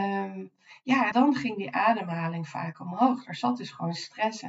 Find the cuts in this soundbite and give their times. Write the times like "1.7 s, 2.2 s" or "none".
1.1 s